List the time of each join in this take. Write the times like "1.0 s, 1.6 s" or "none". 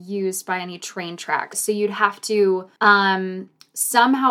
1.5 s, 2.8 s